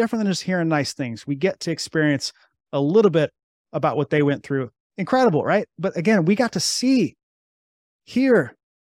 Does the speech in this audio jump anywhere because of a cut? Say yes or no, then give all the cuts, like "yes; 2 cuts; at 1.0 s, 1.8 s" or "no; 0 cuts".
yes; 1 cut; at 4.9 s